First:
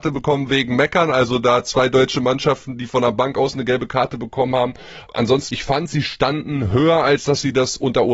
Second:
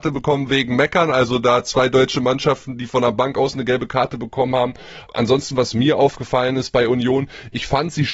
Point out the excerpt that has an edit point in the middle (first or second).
first